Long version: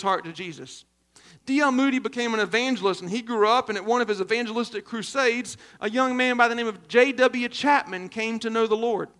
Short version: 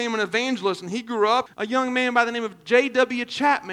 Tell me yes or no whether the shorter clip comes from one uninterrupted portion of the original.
no